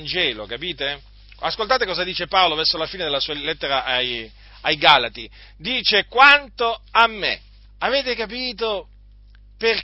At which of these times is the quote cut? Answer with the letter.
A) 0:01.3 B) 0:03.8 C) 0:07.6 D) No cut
C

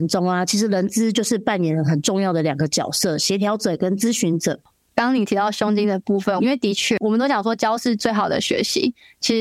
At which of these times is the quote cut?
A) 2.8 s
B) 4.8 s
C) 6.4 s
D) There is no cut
C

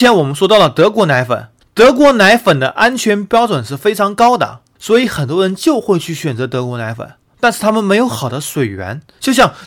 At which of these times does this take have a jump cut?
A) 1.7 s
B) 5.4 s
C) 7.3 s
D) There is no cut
C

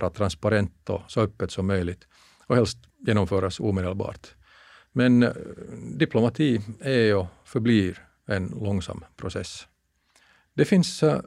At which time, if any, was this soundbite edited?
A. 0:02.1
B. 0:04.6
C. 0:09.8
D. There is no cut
D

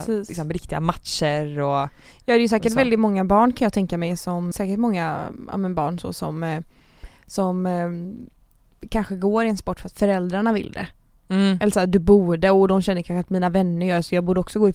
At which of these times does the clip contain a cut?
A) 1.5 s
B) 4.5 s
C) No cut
B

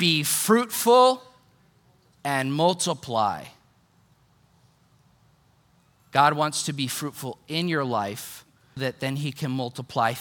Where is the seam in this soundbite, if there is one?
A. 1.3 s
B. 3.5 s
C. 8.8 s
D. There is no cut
C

